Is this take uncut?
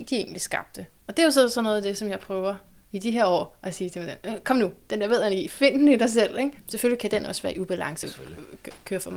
no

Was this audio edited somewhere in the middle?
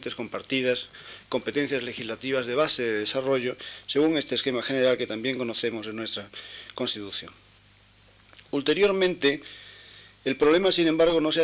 no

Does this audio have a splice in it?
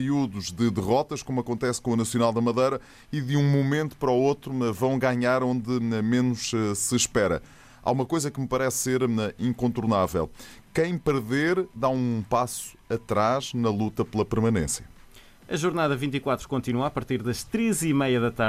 no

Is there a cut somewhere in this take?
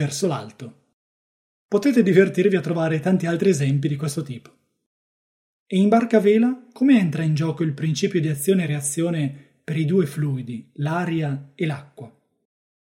no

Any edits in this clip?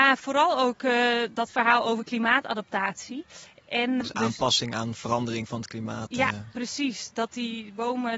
yes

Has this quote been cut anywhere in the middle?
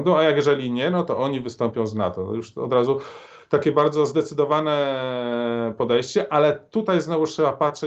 no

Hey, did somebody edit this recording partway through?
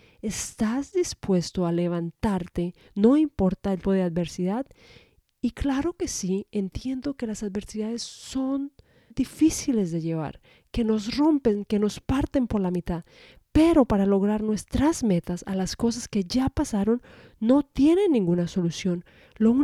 yes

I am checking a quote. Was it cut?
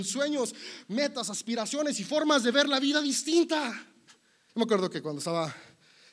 yes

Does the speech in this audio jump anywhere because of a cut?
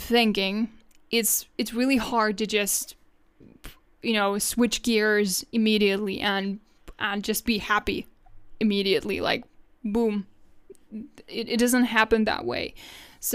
no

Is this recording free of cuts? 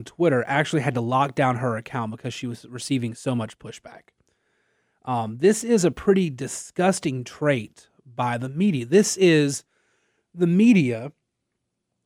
yes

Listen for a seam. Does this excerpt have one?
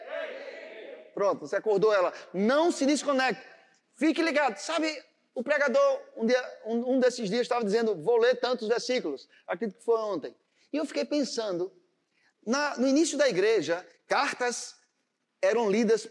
no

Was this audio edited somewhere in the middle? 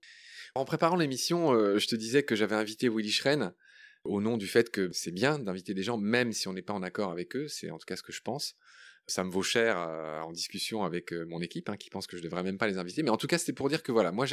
no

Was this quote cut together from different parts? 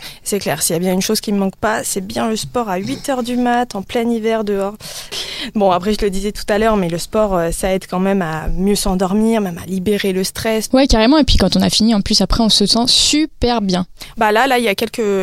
yes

